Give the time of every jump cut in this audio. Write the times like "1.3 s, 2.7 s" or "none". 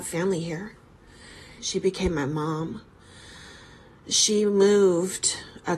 1.6 s